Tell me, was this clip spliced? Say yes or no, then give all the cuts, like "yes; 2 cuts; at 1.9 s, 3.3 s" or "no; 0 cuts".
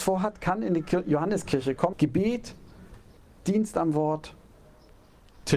yes; 1 cut; at 1.9 s